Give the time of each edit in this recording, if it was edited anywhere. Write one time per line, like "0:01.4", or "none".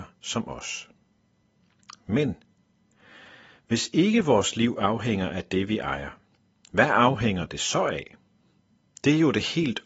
none

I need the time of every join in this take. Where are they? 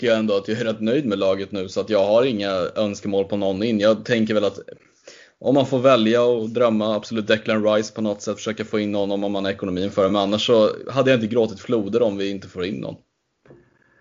none

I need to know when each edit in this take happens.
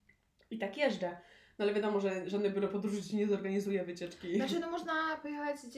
none

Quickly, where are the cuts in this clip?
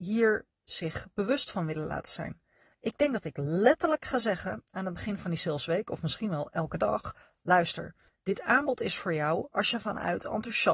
none

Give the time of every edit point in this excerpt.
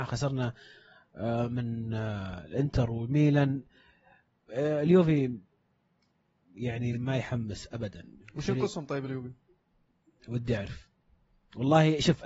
0:06.9

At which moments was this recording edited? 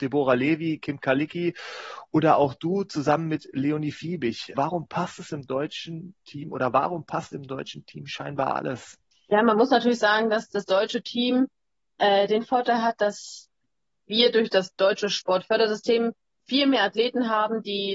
0:04.5

